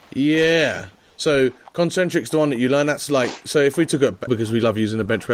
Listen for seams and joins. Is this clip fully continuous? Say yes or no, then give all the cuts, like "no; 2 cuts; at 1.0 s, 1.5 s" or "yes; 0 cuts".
no; 1 cut; at 4.3 s